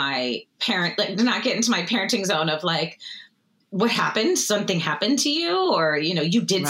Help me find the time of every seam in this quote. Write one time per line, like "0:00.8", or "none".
none